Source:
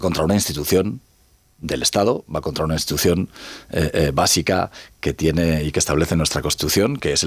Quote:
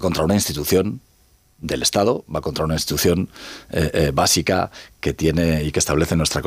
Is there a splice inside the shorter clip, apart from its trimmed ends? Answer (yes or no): no